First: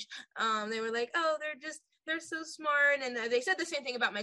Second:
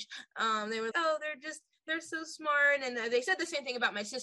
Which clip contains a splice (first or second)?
second